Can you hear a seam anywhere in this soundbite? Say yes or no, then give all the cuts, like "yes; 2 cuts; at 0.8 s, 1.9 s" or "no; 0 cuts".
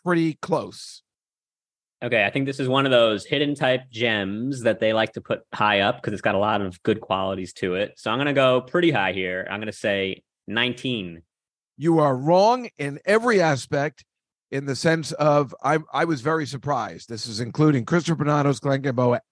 no; 0 cuts